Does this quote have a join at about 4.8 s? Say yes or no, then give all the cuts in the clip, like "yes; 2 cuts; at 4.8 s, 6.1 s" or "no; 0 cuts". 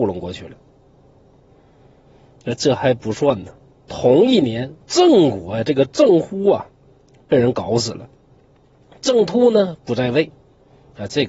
yes; 1 cut; at 4.8 s